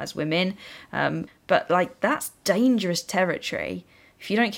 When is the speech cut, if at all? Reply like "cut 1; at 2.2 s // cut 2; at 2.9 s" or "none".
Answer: cut 1; at 1.3 s